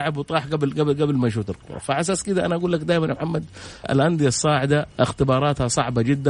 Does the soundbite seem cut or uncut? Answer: cut